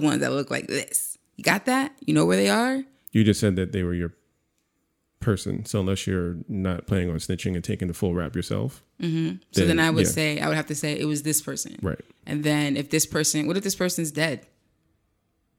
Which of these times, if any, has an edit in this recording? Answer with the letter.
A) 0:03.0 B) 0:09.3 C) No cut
A